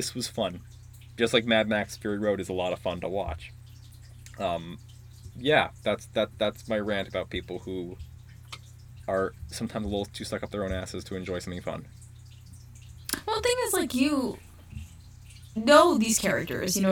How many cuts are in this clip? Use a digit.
0